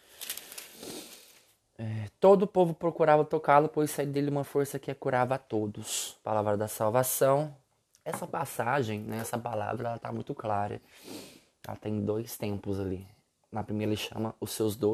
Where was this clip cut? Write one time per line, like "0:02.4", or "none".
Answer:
0:07.9